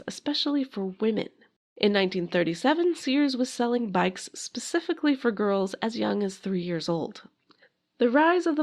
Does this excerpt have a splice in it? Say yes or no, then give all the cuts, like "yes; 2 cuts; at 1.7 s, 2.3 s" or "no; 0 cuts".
yes; 1 cut; at 1.6 s